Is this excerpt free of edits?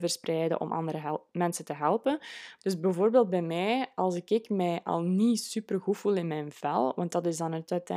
no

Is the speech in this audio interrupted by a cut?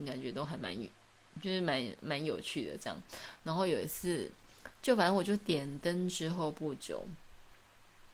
no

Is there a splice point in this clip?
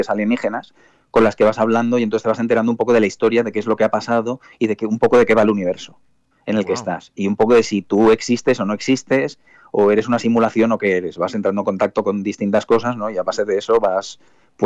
no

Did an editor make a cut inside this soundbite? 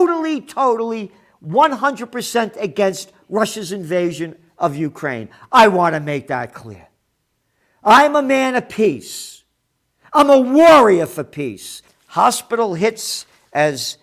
yes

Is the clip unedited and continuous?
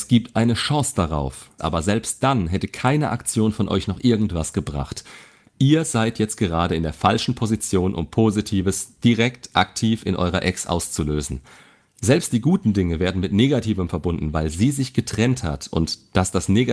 no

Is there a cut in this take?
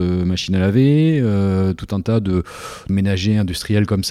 yes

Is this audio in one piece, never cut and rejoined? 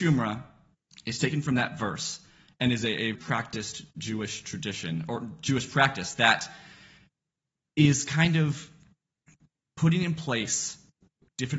no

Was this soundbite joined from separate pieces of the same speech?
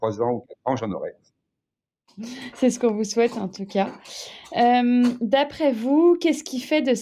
no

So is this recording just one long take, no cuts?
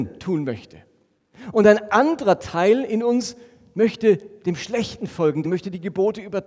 no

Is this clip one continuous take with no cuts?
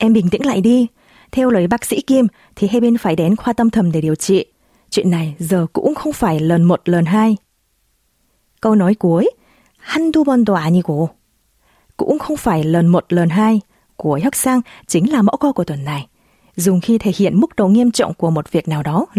yes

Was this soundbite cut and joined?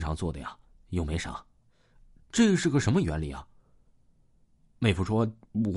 no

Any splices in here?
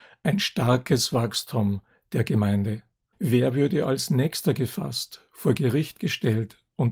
yes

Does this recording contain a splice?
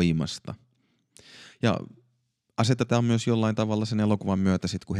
no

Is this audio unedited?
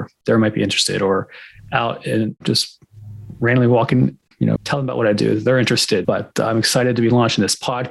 no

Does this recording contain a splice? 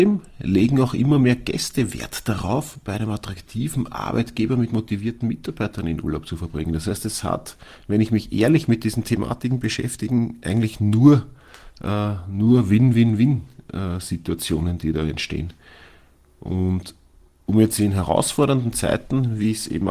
no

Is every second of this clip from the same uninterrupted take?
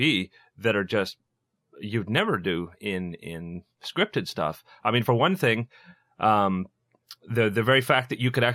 yes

